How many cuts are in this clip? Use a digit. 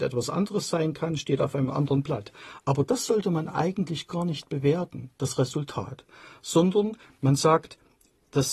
0